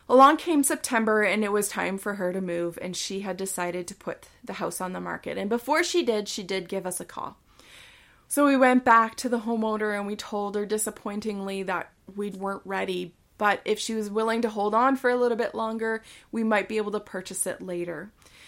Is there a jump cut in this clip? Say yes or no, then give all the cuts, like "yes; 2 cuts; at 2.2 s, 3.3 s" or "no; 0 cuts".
yes; 2 cuts; at 8.3 s, 12.3 s